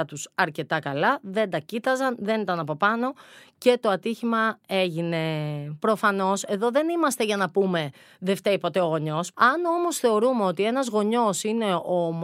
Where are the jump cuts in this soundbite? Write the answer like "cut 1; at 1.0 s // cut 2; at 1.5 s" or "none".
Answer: cut 1; at 5.8 s